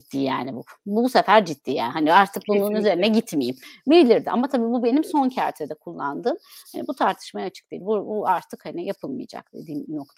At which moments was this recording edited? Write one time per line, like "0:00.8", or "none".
none